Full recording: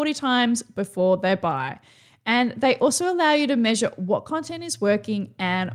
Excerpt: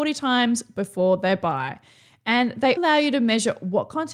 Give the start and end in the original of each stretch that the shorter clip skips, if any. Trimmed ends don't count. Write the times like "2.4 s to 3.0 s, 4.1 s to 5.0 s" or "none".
2.8 s to 3.1 s